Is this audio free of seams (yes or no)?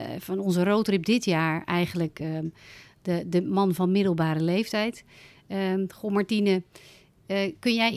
yes